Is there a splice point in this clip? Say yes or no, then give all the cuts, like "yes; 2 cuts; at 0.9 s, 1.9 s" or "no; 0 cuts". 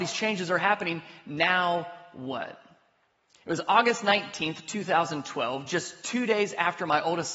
no; 0 cuts